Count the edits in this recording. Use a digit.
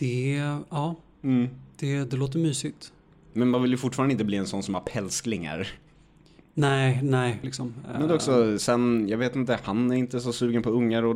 1